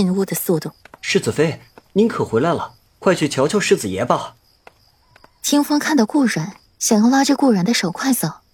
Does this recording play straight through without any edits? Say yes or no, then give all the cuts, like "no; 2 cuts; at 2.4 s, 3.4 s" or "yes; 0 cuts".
no; 2 cuts; at 1.0 s, 6.7 s